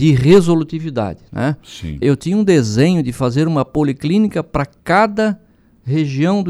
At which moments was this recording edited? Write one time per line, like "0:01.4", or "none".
0:02.0

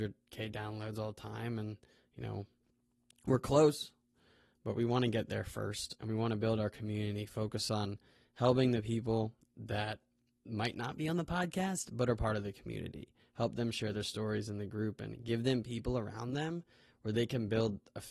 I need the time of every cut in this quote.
none

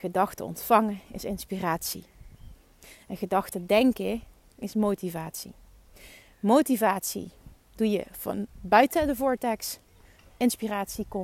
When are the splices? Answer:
none

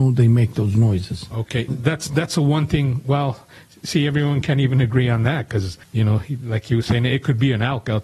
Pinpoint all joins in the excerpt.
0:01.7
0:05.8

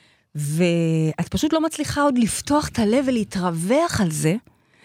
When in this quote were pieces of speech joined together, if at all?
none

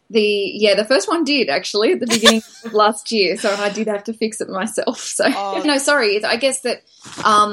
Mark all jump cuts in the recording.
0:05.6

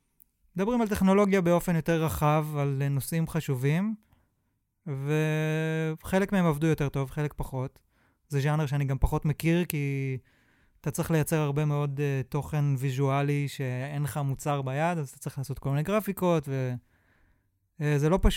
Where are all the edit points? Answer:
none

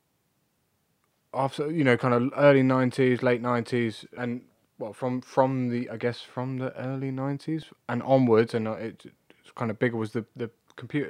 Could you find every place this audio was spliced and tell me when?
0:04.2

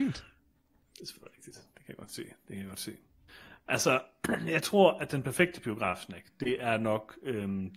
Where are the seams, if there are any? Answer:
none

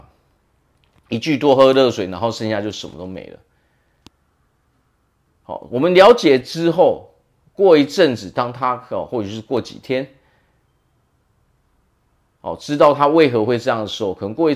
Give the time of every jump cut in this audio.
none

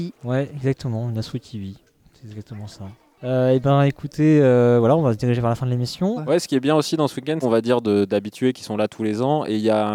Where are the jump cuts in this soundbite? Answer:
0:06.2
0:07.4

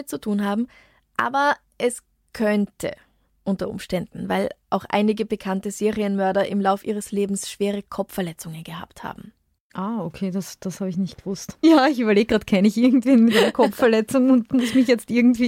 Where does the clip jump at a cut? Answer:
0:11.6

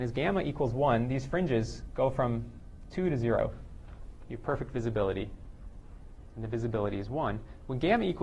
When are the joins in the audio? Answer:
none

